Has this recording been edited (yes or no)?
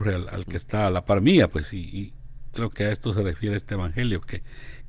no